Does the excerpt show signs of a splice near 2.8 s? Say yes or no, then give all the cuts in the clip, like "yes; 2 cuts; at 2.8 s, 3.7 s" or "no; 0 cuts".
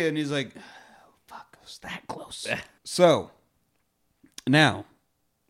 yes; 1 cut; at 2.8 s